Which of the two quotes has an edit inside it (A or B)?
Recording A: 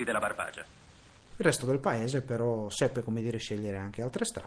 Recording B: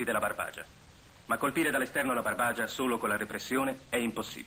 A